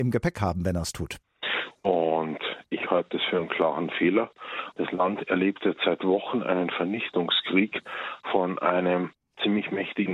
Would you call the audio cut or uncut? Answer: cut